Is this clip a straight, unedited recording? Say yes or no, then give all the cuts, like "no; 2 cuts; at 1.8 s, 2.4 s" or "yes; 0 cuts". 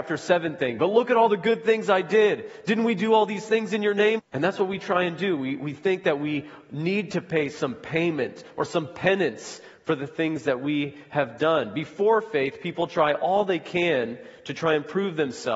no; 1 cut; at 4.2 s